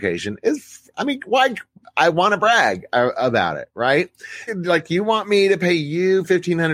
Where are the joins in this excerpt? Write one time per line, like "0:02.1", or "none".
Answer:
0:04.5